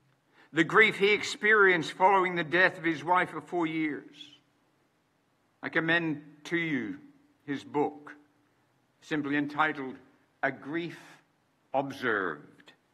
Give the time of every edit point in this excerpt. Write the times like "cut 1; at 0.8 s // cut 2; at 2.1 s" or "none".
none